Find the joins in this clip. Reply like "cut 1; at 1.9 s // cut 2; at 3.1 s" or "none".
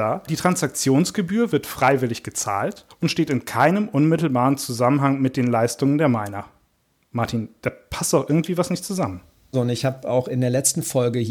cut 1; at 9.5 s

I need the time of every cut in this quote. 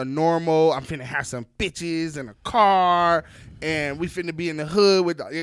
none

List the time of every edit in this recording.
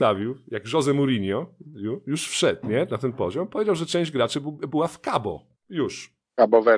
cut 1; at 5.6 s

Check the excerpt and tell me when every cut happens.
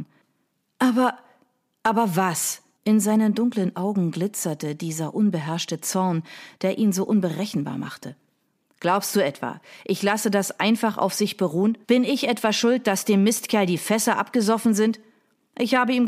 cut 1; at 2.8 s // cut 2; at 11.8 s

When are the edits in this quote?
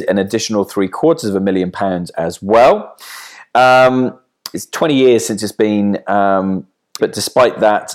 cut 1; at 4.5 s // cut 2; at 7.0 s

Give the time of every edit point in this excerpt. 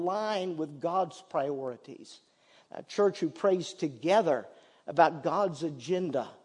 cut 1; at 2.7 s

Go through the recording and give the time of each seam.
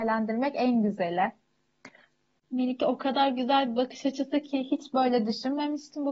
cut 1; at 2.4 s

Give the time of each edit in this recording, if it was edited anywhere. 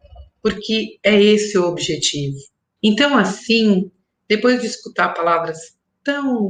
cut 1; at 2.8 s

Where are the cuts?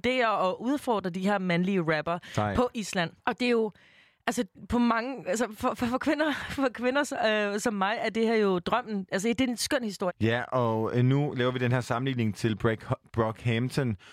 cut 1; at 3.2 s // cut 2; at 10.1 s

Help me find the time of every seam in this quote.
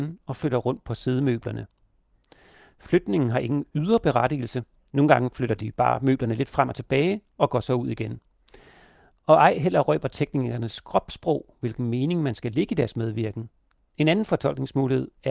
cut 1; at 13.8 s

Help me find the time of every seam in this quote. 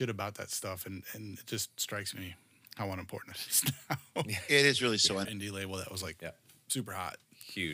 cut 1; at 5.2 s

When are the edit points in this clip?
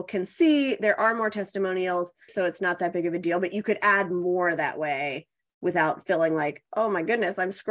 cut 1; at 2.3 s

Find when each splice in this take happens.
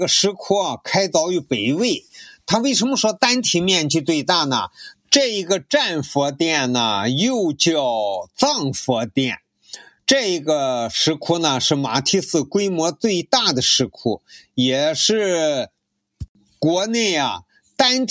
cut 1; at 4.9 s

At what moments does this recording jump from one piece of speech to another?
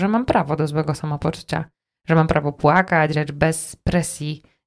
cut 1; at 3.1 s

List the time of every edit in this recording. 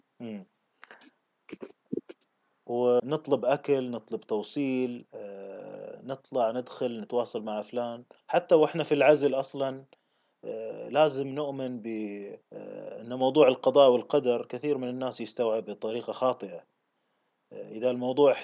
cut 1; at 3.0 s // cut 2; at 12.4 s

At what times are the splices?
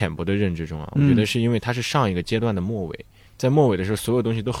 cut 1; at 3.3 s

